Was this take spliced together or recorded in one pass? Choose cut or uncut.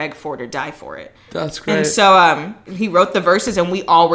cut